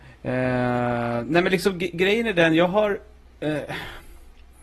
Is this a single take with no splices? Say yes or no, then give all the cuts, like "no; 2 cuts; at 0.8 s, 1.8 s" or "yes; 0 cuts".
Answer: yes; 0 cuts